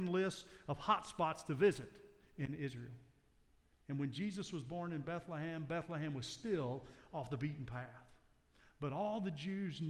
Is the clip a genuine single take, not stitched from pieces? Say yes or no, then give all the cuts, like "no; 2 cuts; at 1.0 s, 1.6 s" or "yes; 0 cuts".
yes; 0 cuts